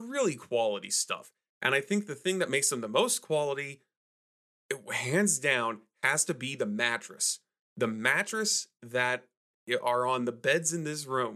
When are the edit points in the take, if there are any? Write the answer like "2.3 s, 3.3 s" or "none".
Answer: none

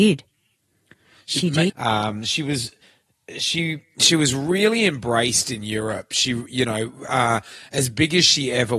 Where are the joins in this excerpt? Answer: 1.7 s

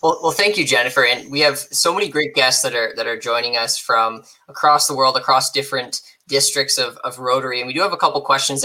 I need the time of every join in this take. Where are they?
none

